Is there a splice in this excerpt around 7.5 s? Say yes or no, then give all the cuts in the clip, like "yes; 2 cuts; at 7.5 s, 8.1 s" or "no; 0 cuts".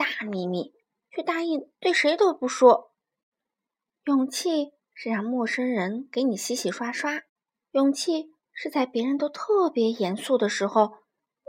yes; 1 cut; at 7.5 s